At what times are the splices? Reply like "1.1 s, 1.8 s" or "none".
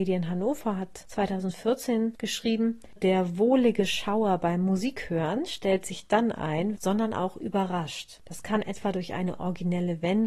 3.0 s, 6.7 s